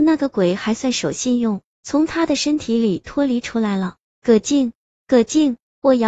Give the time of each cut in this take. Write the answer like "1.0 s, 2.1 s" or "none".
none

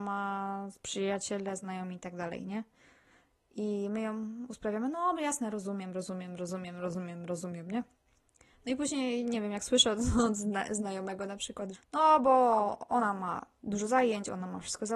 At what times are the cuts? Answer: 11.7 s

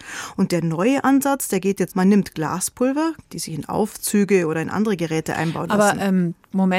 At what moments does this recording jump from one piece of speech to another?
1.9 s, 3.3 s

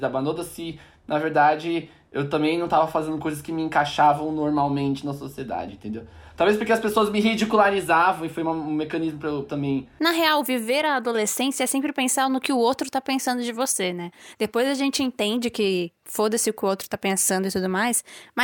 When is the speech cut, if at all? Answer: none

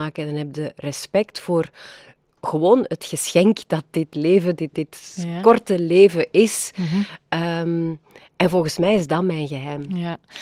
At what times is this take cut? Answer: 4.7 s

